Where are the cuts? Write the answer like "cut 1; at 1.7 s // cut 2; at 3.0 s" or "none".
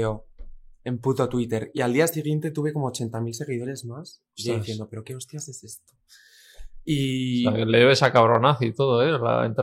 none